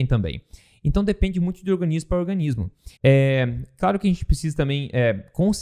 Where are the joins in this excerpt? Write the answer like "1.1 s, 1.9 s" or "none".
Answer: 3.0 s